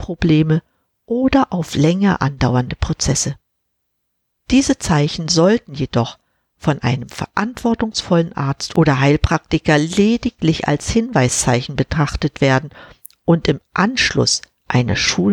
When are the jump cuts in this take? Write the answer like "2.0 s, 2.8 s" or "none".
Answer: 4.4 s